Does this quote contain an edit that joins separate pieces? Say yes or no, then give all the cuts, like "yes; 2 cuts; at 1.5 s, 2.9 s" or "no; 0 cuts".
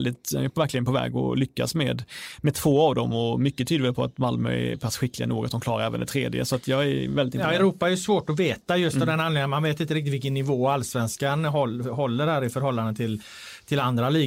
no; 0 cuts